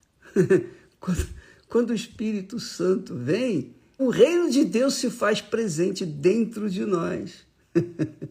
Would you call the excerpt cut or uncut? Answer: cut